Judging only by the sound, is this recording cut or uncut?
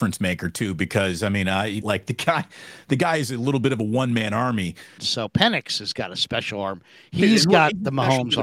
cut